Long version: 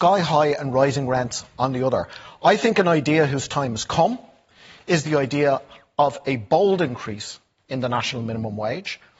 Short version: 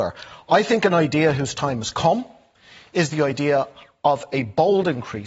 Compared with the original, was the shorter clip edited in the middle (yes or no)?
no